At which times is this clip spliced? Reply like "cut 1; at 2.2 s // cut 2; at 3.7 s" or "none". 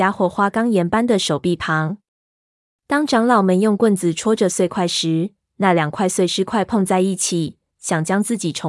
cut 1; at 7.7 s